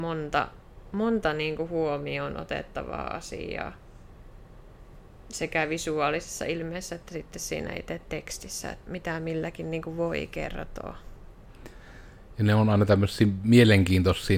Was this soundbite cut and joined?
yes; 1 cut; at 8.8 s

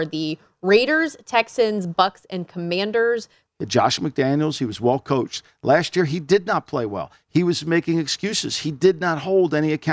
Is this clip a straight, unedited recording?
no; 1 cut; at 3.5 s

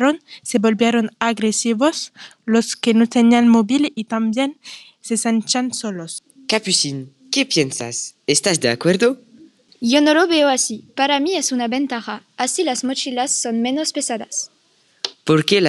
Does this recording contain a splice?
no; 0 cuts

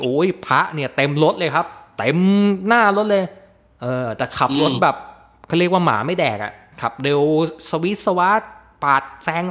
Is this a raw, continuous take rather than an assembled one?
yes; 0 cuts

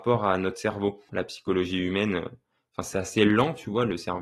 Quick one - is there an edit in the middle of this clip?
yes; 1 cut; at 1.1 s

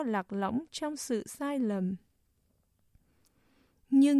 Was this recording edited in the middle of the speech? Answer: no; 0 cuts

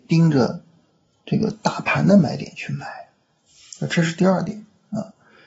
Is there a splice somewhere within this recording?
no; 0 cuts

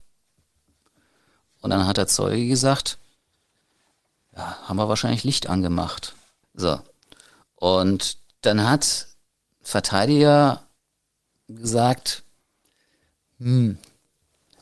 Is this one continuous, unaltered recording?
no; 1 cut; at 6.4 s

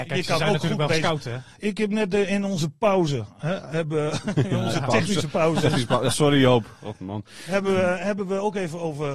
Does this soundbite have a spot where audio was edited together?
no; 0 cuts

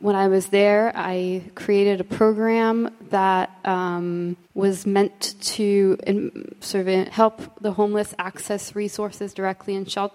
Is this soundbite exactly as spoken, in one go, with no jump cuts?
no; 2 cuts; at 4.4 s, 7.1 s

